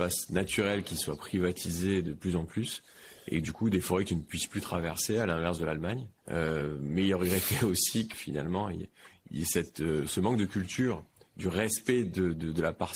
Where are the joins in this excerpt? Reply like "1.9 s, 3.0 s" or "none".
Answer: 6.2 s, 8.1 s